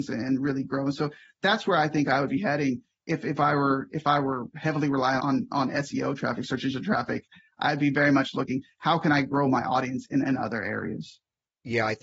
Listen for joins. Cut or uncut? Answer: cut